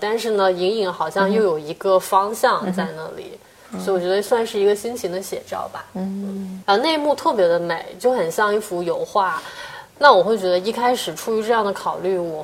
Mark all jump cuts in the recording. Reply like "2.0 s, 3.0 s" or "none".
6.6 s, 10.0 s